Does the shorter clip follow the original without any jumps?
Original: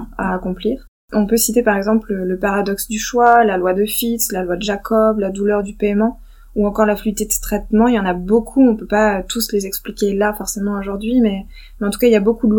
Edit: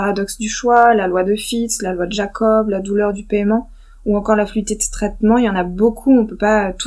yes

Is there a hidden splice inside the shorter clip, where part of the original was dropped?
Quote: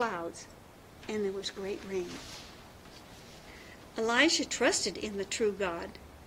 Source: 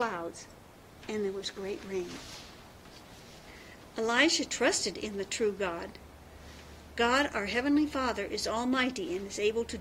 no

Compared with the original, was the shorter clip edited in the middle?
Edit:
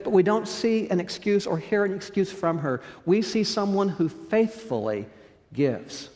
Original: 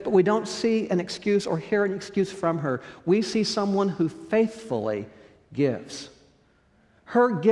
no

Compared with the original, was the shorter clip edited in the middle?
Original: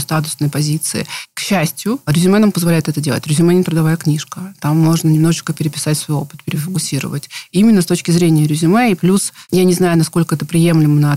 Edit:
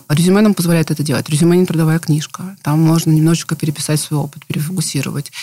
no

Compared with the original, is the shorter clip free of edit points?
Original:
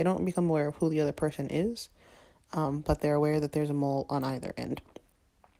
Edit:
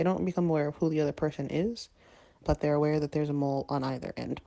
no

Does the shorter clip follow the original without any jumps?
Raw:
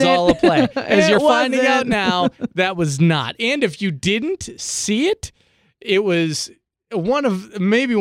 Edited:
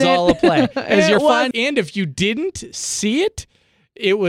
no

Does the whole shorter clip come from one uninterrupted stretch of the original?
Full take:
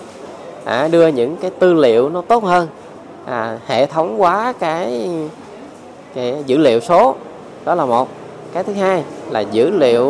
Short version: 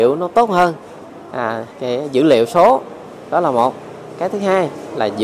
no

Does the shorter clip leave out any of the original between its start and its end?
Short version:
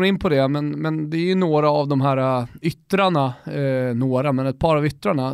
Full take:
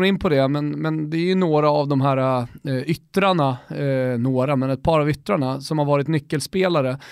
yes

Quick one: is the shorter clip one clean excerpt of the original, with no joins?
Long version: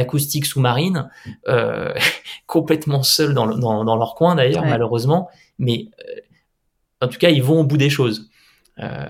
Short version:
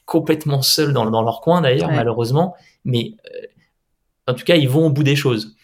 no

